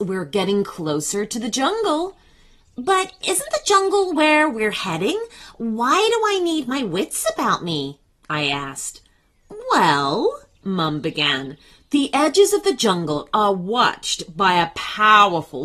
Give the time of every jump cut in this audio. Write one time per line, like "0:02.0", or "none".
none